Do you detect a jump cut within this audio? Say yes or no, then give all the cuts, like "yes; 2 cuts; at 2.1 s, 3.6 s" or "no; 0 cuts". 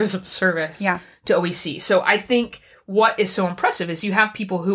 no; 0 cuts